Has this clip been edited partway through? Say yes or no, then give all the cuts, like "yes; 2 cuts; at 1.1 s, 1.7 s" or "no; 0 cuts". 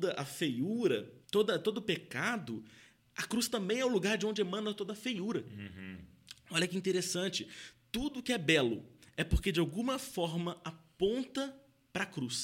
yes; 1 cut; at 1.2 s